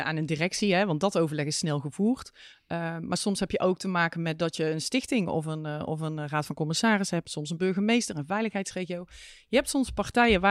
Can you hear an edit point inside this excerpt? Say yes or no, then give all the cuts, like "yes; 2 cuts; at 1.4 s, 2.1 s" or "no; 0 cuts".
no; 0 cuts